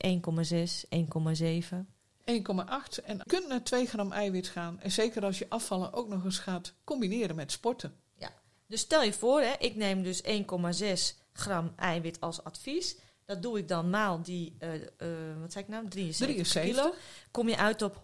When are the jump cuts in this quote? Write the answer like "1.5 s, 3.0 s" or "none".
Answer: none